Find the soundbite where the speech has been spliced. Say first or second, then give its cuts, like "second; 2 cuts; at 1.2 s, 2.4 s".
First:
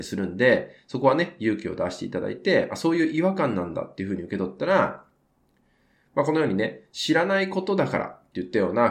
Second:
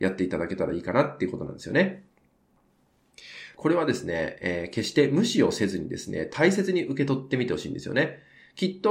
second; 1 cut; at 3.5 s